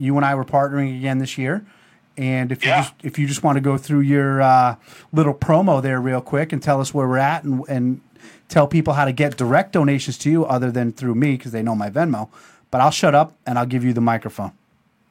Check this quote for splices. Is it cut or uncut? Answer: uncut